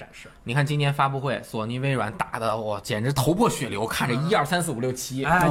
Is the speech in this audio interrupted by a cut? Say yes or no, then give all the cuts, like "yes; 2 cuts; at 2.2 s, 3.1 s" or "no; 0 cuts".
no; 0 cuts